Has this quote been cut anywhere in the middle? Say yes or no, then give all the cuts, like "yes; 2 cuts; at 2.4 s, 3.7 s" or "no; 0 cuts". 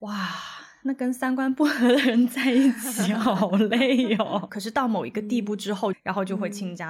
yes; 2 cuts; at 4.5 s, 5.9 s